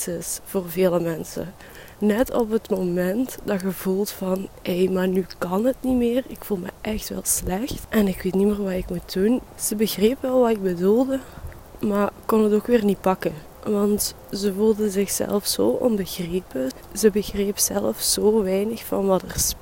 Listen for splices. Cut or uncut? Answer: cut